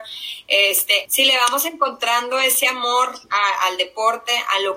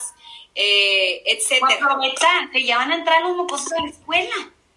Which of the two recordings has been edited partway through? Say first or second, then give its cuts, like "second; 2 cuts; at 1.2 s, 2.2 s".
first; 1 cut; at 1.0 s